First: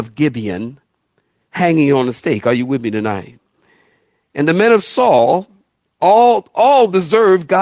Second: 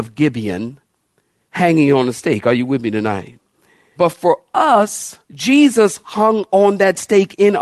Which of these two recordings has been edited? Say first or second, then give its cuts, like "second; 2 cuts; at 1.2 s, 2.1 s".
second; 2 cuts; at 4.0 s, 5.2 s